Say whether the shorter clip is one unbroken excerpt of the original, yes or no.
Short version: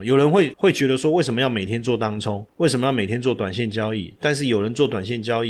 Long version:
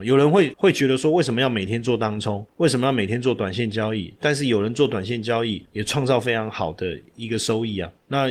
yes